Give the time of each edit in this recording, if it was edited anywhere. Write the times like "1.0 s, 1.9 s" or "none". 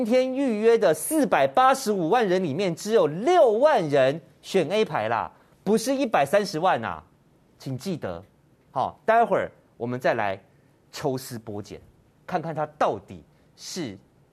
none